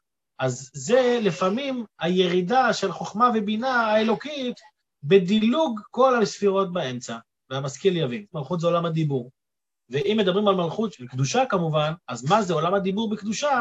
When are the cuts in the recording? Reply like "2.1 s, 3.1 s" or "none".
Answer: 8.3 s, 10.9 s, 12.0 s